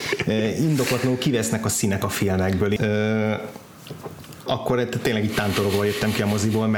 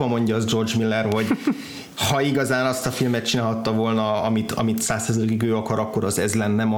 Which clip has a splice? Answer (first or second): first